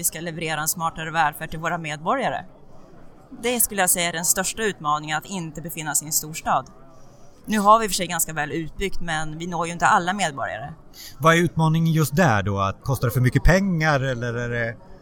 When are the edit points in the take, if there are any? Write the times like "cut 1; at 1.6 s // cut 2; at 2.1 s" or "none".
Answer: cut 1; at 12.8 s